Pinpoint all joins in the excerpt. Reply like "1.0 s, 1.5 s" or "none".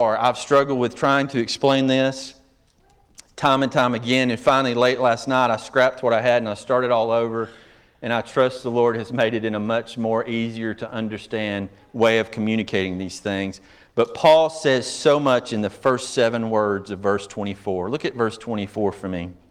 none